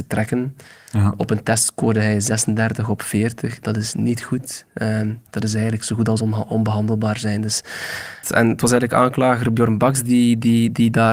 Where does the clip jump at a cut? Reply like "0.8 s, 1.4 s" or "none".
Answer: 8.2 s